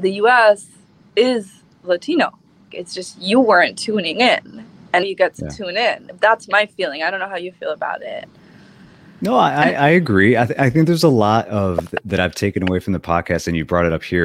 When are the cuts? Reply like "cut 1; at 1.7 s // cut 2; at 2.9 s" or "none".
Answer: cut 1; at 2.7 s // cut 2; at 5.0 s

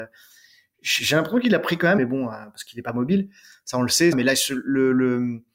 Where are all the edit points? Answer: cut 1; at 2.0 s // cut 2; at 4.1 s

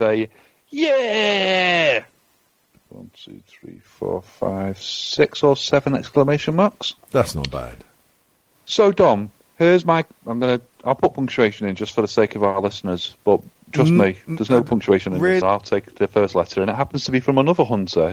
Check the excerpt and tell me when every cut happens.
cut 1; at 15.4 s

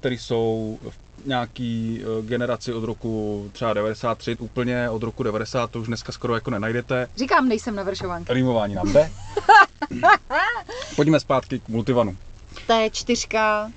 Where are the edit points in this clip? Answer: cut 1; at 4.4 s // cut 2; at 7.1 s

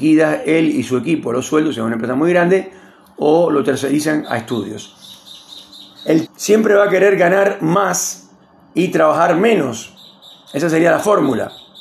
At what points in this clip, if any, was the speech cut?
cut 1; at 6.3 s

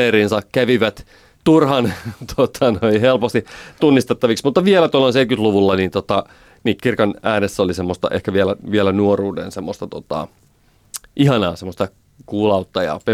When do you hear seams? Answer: cut 1; at 6.8 s

